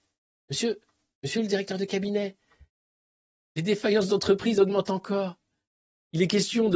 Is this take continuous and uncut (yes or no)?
yes